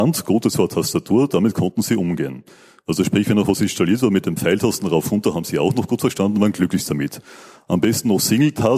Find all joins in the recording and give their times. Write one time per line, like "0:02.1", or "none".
none